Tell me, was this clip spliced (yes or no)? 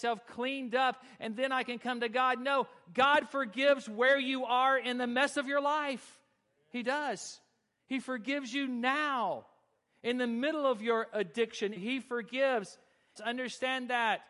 yes